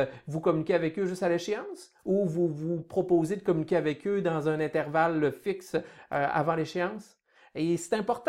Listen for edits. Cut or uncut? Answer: uncut